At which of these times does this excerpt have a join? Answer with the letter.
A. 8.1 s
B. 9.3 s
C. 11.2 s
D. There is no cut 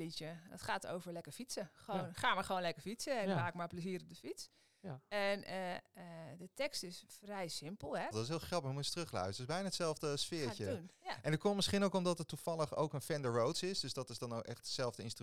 A